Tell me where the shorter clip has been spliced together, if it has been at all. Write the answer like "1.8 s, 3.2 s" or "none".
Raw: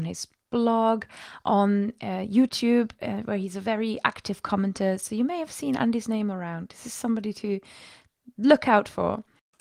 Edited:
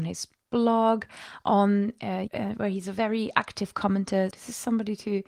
2.3 s, 4.3 s